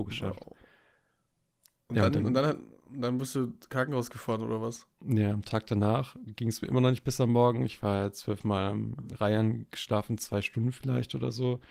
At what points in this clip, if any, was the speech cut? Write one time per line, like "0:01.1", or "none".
none